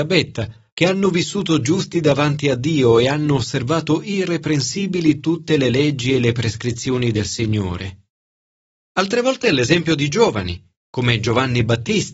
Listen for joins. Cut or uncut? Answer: uncut